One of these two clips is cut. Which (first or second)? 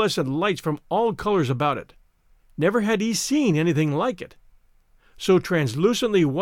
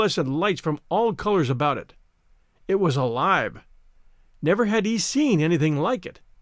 first